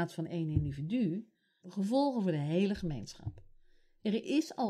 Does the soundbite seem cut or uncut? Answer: cut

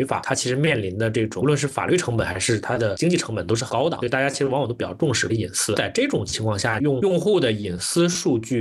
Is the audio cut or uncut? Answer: cut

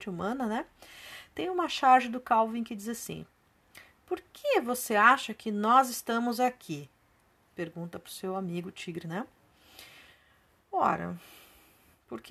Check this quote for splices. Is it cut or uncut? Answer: uncut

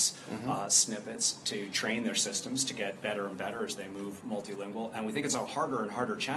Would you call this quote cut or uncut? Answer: uncut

